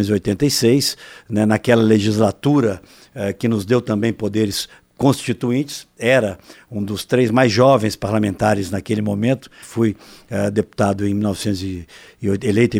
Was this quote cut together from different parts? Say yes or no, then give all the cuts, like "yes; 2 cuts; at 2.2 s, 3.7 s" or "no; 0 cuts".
yes; 1 cut; at 9.6 s